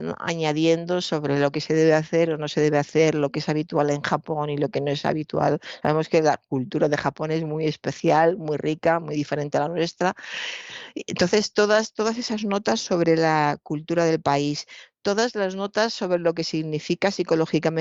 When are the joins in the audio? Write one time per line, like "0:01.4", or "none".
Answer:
none